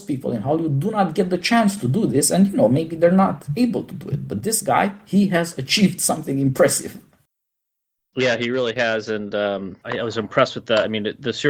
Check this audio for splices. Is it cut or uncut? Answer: uncut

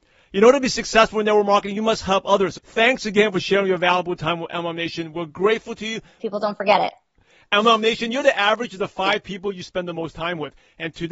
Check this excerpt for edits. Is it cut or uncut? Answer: cut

